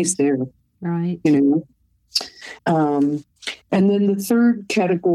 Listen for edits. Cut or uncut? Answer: cut